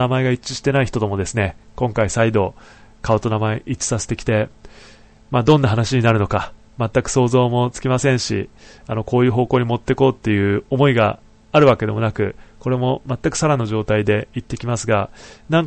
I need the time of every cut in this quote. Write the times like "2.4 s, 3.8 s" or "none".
none